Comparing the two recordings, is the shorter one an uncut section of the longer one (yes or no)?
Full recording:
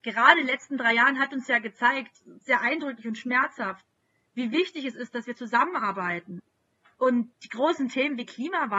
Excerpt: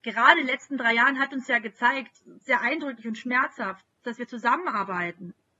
no